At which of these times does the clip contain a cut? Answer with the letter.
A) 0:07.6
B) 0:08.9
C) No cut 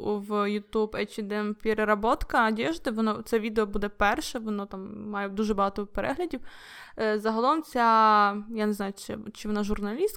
C